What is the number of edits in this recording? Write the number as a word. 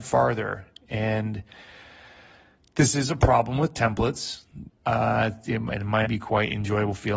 two